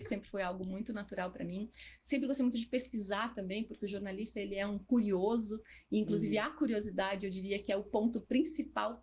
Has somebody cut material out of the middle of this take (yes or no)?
no